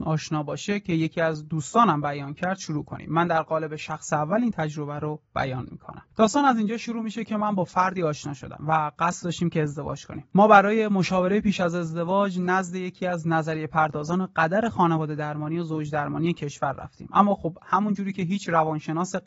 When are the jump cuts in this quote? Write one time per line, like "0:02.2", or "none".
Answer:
0:06.1